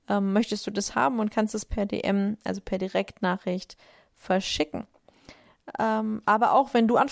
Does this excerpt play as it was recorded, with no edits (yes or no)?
yes